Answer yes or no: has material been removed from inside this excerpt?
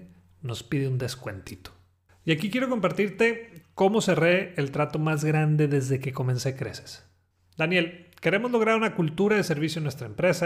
yes